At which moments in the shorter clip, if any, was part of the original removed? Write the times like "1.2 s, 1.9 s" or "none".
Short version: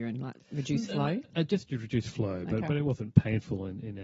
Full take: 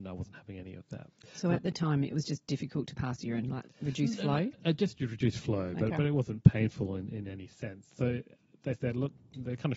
none

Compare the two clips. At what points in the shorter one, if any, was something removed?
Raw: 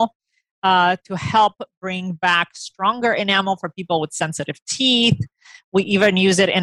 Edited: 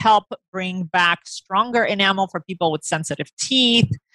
none

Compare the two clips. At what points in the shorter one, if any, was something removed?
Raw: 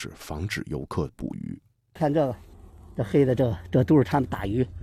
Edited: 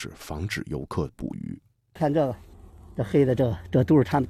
none

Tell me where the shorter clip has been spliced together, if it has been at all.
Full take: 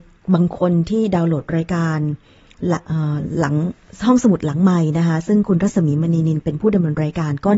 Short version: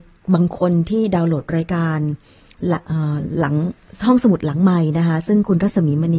none

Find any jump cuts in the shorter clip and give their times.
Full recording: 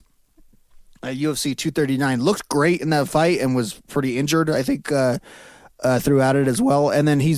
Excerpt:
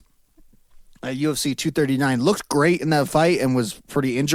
none

